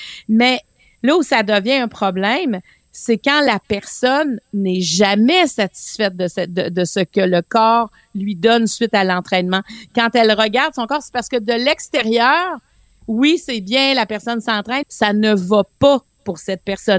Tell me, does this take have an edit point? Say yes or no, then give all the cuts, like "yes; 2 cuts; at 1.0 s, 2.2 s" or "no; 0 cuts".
yes; 1 cut; at 14.8 s